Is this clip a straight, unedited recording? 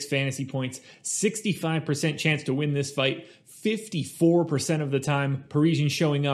yes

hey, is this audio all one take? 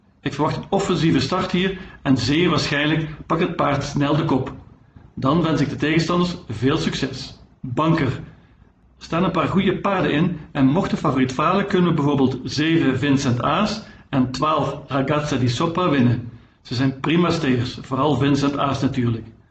yes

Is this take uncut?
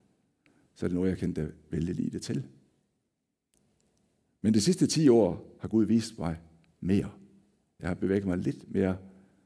no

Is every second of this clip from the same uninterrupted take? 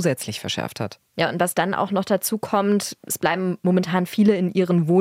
yes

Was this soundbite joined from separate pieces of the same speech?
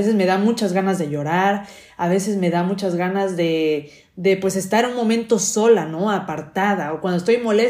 no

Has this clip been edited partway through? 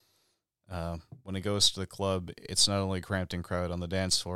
no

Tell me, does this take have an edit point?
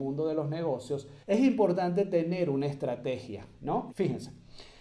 yes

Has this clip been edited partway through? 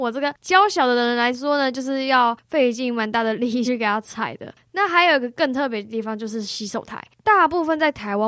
yes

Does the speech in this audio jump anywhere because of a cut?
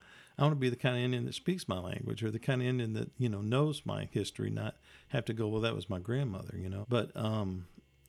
yes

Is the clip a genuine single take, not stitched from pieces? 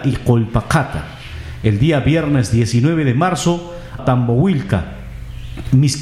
no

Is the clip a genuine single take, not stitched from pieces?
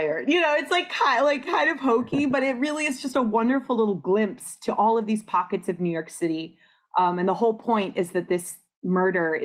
yes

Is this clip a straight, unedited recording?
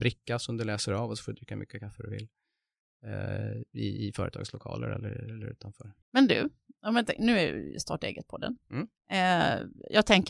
no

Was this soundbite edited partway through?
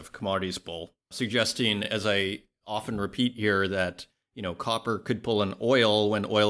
no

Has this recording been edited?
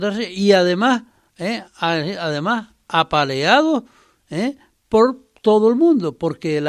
no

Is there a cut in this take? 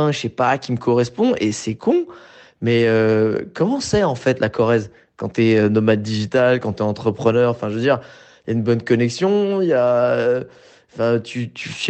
no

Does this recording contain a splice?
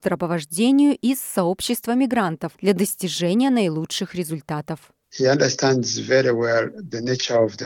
yes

